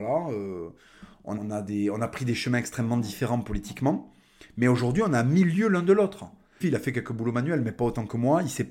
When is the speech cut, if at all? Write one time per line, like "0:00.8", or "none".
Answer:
0:01.4
0:06.6